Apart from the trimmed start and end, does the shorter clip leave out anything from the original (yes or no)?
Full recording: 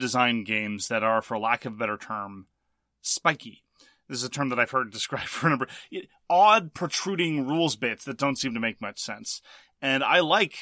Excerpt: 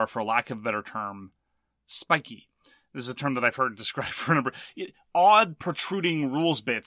no